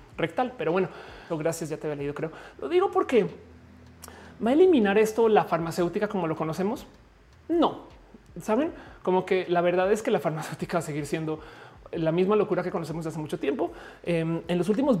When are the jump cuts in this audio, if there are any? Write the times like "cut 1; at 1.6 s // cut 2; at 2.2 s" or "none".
cut 1; at 1.3 s // cut 2; at 2.5 s